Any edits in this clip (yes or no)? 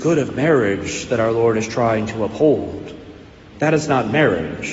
yes